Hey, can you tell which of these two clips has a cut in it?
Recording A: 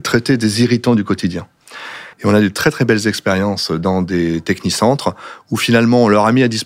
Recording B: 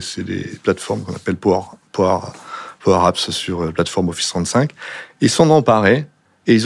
A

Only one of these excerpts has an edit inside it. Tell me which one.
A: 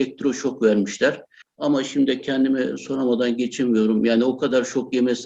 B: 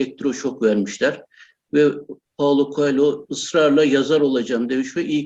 A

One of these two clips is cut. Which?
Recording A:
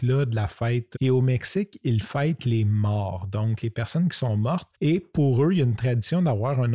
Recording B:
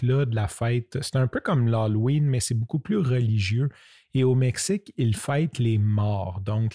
A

